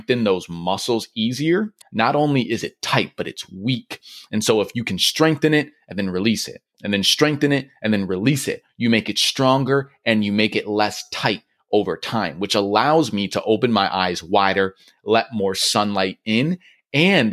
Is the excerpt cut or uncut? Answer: cut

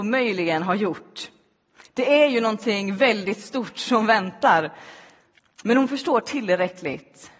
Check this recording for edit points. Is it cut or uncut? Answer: uncut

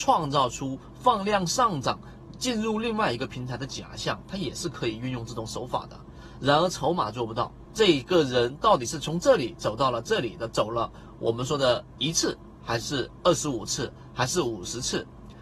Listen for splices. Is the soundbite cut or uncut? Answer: cut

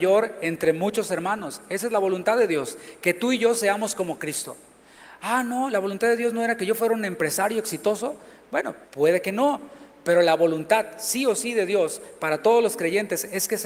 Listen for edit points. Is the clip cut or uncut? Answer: cut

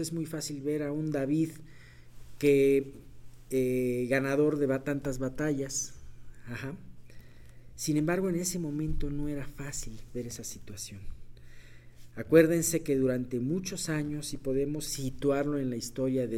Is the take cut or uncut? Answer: uncut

